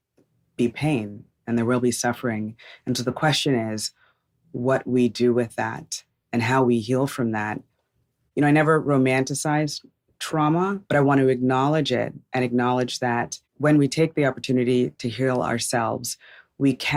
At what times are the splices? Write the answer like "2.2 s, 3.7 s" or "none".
10.8 s